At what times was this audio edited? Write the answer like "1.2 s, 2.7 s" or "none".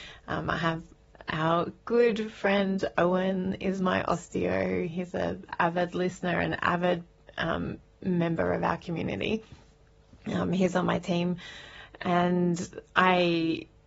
none